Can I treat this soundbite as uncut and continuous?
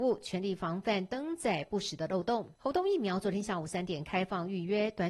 no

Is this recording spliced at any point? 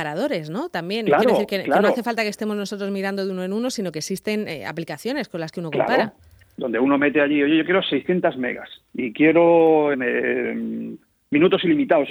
yes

